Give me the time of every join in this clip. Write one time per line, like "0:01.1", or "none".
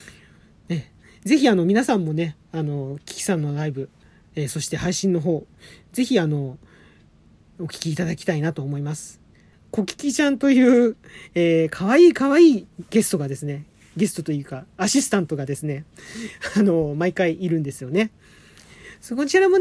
0:09.5